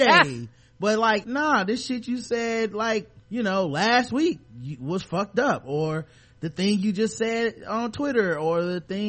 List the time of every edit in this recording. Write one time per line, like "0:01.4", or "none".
0:01.2
0:03.2